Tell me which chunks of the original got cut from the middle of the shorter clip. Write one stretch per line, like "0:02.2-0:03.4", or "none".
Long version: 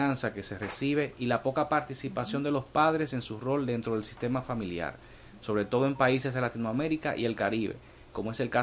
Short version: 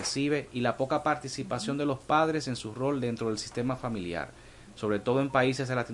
none